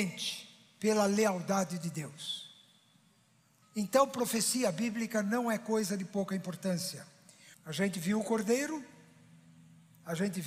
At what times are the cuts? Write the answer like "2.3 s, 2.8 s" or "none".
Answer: 3.6 s, 7.5 s

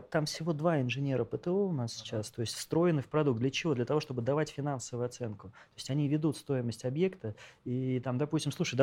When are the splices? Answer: none

